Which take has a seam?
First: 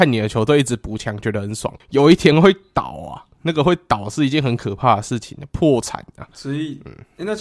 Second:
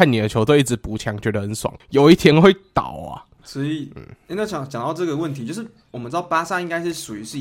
second; 1 cut; at 3.4 s

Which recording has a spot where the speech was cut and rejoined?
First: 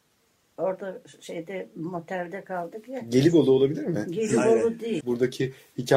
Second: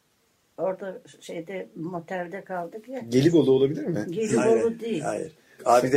first; 1 cut; at 5.0 s

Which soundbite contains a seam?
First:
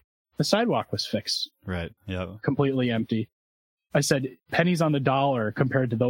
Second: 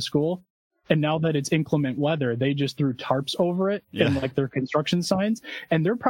first; 1 cut; at 2.0 s

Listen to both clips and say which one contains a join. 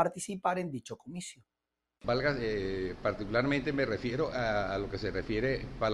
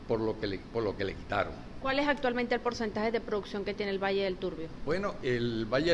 first; 1 cut; at 2.0 s

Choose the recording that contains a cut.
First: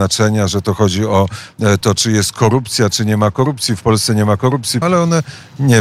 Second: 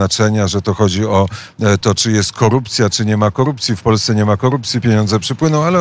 first; 1 cut; at 4.8 s

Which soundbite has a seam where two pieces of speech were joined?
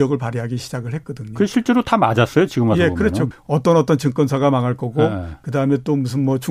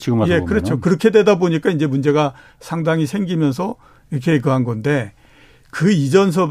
first; 1 cut; at 3.3 s

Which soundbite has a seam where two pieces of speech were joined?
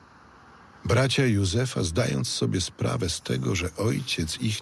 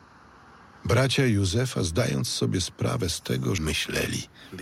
second; 1 cut; at 3.6 s

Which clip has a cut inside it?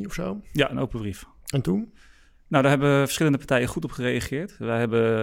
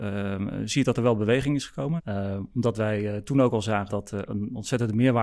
second; 2 cuts; at 2.0 s, 3.9 s

